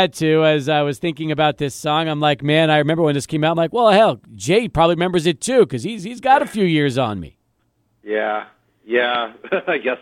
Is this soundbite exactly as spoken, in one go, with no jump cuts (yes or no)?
yes